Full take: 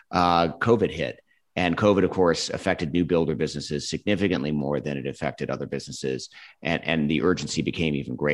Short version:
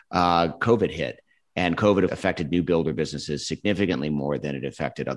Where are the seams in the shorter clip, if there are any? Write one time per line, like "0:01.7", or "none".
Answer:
0:02.1